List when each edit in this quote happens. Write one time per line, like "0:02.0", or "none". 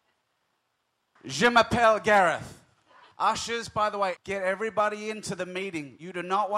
0:01.2
0:03.1
0:04.2